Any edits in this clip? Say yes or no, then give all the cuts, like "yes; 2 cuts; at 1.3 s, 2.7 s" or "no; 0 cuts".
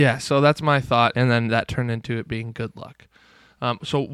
yes; 1 cut; at 1.1 s